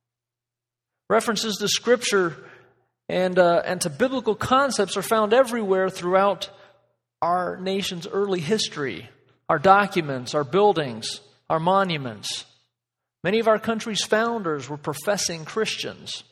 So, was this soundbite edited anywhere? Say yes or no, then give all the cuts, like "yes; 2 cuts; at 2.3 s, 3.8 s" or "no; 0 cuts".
no; 0 cuts